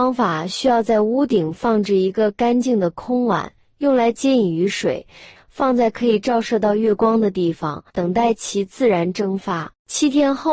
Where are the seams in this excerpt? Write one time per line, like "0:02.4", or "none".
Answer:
0:05.4
0:07.9